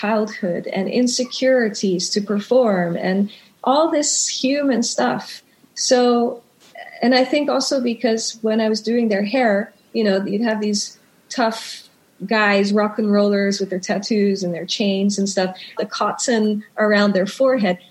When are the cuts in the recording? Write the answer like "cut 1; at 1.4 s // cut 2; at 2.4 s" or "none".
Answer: cut 1; at 15.8 s